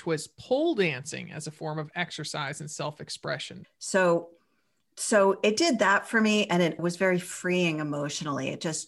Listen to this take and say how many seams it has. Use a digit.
2